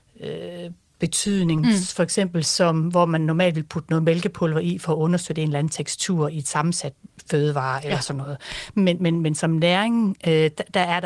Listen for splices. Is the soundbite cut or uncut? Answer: uncut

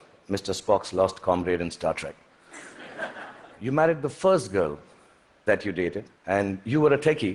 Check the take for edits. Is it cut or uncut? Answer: cut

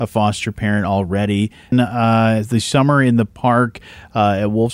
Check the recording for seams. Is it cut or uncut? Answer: cut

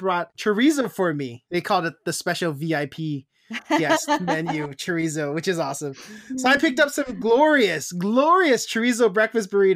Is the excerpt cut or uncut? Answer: uncut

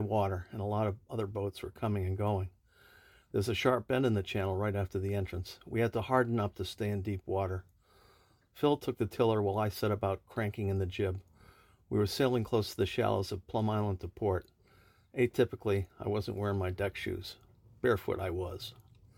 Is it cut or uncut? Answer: uncut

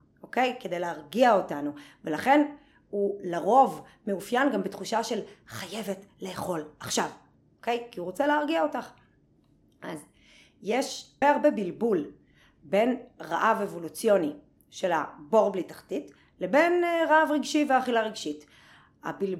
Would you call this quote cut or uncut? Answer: cut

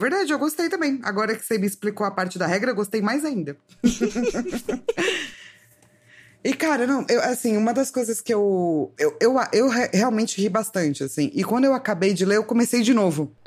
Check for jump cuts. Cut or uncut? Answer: uncut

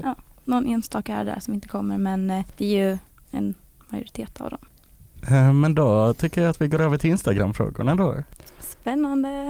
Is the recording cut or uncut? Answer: uncut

